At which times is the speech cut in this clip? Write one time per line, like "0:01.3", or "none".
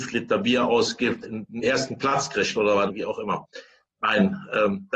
0:01.2
0:02.9